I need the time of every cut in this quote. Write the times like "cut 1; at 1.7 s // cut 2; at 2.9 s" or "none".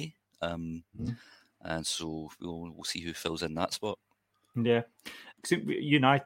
cut 1; at 5.3 s